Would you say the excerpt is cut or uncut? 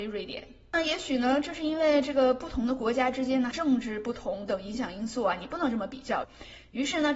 cut